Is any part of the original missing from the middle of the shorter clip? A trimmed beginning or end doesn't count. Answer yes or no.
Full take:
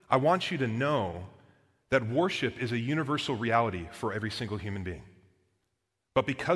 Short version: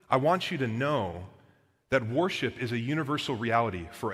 no